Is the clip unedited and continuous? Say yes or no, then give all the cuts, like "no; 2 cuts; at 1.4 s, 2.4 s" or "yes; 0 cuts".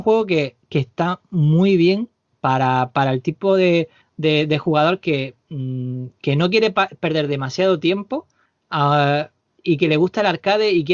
yes; 0 cuts